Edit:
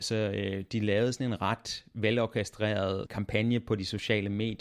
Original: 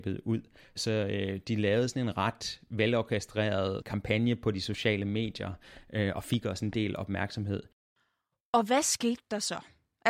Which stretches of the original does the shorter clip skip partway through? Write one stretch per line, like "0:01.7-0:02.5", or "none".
none